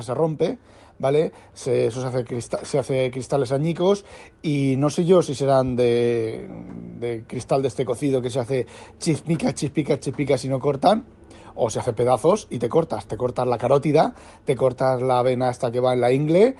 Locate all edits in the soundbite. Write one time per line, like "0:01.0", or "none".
none